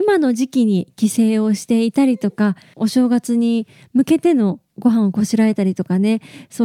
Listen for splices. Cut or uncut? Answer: cut